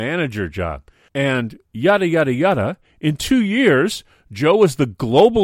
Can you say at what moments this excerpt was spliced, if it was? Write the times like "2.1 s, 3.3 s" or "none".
1.1 s